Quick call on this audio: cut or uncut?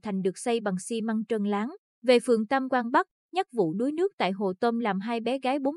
cut